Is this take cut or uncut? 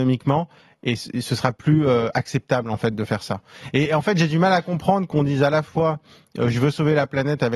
uncut